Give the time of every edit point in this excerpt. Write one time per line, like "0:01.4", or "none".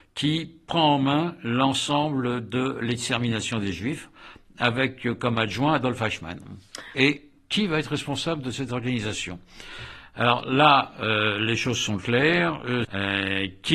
0:06.9
0:12.8